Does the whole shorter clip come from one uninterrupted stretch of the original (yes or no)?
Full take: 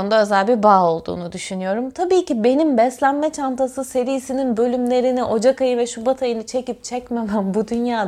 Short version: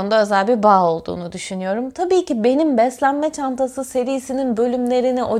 yes